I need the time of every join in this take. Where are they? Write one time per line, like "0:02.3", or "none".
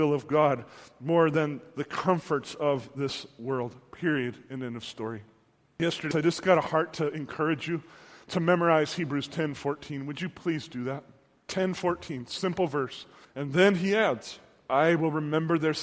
0:06.1
0:11.5
0:13.2